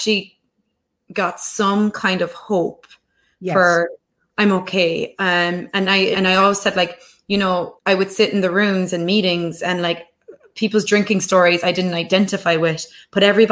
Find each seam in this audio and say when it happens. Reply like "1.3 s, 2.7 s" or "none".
6.1 s, 7.8 s